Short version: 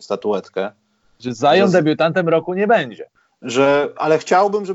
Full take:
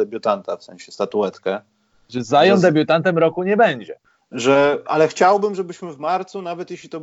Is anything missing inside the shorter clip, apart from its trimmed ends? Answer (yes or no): no